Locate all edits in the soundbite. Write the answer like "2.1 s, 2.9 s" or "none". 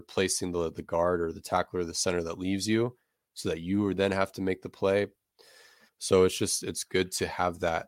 5.9 s